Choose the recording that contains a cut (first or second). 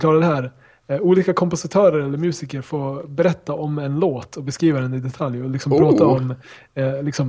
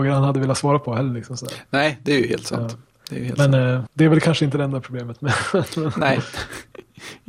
second